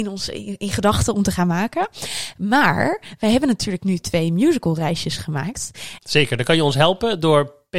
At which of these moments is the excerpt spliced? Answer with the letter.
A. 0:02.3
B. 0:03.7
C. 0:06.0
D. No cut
C